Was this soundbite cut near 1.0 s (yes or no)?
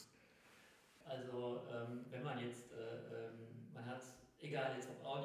yes